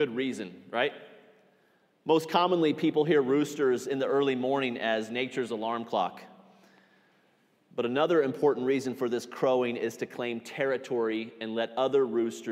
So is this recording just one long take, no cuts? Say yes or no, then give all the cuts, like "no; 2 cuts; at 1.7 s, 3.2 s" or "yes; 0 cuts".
yes; 0 cuts